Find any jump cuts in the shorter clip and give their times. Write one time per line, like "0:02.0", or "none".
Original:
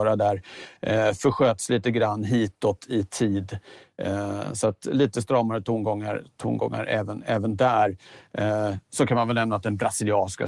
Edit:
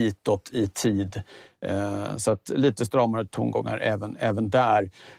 0:03.3